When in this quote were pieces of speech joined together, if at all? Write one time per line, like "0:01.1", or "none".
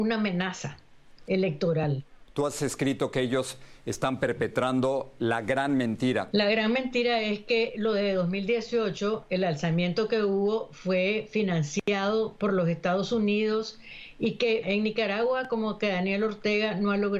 0:06.3
0:14.6